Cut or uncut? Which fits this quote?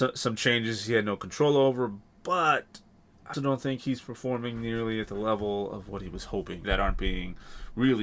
cut